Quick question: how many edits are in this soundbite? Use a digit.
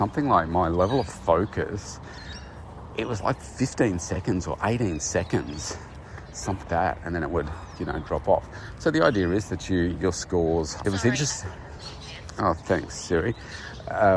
2